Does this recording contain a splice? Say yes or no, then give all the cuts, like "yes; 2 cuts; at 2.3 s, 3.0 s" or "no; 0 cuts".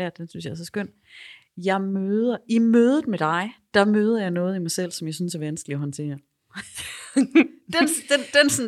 no; 0 cuts